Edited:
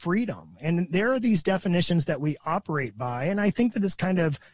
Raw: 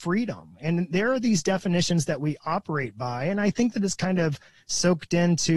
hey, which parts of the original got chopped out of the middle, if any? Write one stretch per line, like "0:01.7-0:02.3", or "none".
none